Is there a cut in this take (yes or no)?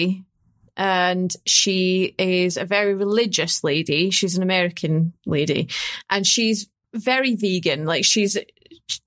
no